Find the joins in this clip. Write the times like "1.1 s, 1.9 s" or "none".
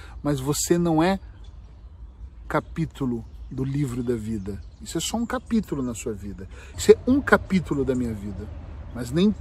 2.4 s, 6.7 s